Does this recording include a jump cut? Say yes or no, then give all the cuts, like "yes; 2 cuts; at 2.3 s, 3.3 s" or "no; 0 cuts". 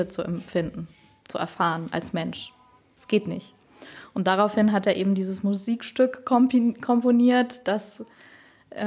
no; 0 cuts